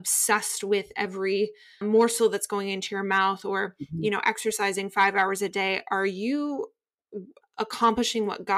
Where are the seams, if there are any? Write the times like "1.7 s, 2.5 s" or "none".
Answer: 1.8 s, 7.4 s